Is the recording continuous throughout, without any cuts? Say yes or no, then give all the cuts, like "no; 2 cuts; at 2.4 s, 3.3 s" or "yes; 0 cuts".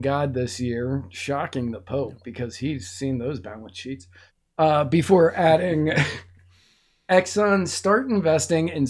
yes; 0 cuts